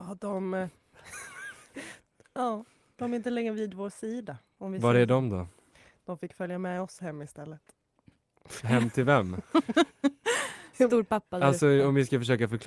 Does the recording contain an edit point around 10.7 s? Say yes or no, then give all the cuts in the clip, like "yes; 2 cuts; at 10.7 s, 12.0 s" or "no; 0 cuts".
yes; 1 cut; at 10.7 s